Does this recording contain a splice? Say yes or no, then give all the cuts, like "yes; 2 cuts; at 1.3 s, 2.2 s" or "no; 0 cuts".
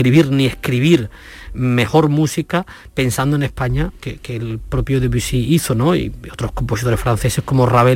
no; 0 cuts